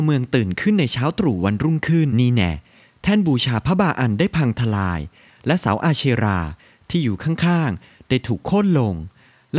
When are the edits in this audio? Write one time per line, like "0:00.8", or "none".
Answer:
0:02.1